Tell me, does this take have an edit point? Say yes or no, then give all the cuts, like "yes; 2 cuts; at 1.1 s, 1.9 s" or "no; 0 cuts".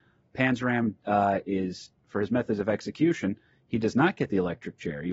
no; 0 cuts